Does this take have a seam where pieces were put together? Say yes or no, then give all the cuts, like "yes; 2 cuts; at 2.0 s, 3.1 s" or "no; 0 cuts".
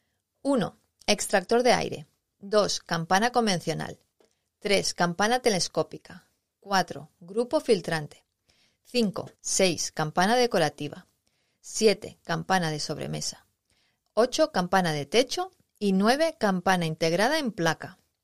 yes; 1 cut; at 9.3 s